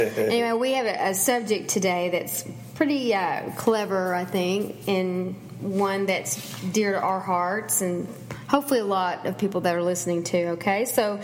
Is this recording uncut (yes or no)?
yes